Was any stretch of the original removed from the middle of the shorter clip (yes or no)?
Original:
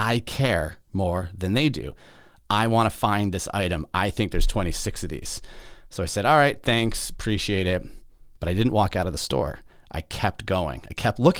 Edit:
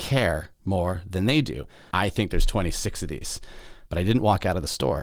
yes